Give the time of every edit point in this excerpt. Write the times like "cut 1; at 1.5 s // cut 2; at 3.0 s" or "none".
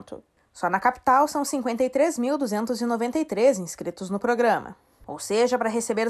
cut 1; at 5.0 s